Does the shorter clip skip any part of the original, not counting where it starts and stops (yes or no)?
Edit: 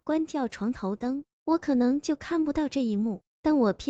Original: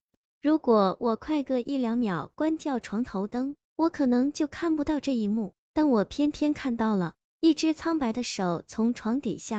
no